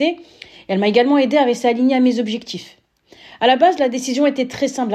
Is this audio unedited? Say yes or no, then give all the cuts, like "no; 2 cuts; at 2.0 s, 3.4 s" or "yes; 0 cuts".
yes; 0 cuts